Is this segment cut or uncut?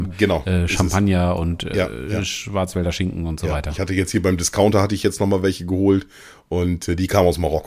uncut